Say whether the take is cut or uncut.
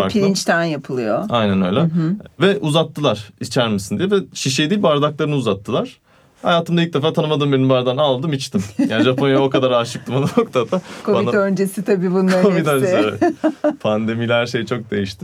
uncut